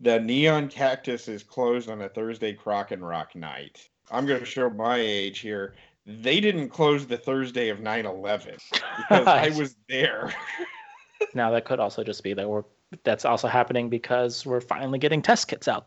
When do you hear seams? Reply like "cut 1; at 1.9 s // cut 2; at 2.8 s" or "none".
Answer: cut 1; at 11.3 s